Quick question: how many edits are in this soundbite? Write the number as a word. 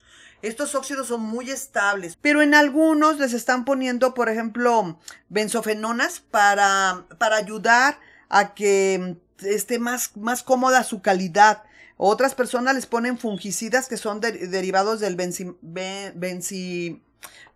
one